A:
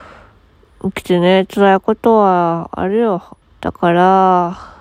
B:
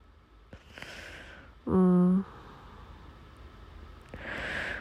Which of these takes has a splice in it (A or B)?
A